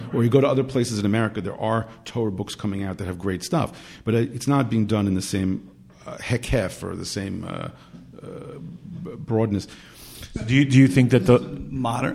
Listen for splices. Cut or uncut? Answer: uncut